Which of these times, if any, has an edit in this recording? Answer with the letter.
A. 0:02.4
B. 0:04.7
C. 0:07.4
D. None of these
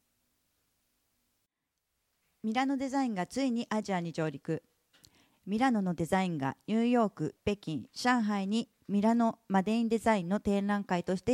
C